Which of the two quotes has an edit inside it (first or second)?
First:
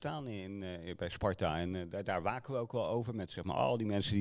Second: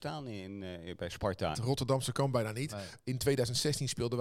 second